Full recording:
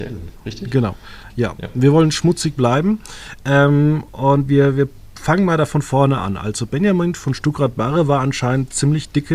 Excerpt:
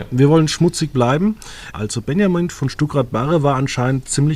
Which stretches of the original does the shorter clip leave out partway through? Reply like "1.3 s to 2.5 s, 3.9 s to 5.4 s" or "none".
3.4 s to 6.4 s